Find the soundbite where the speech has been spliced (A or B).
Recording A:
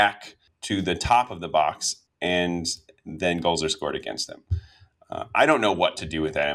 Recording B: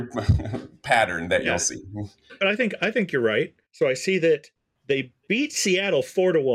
B